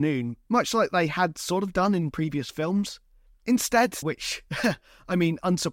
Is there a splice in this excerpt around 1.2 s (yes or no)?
no